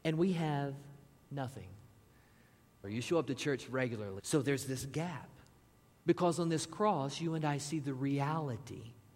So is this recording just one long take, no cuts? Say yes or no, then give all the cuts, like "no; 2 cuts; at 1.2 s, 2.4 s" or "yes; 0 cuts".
no; 3 cuts; at 2.8 s, 4.2 s, 6.0 s